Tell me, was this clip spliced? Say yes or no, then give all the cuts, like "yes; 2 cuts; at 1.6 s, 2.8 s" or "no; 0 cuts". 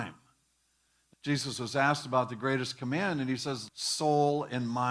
yes; 2 cuts; at 1.1 s, 3.7 s